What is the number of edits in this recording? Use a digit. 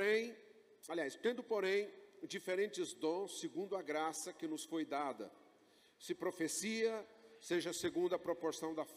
0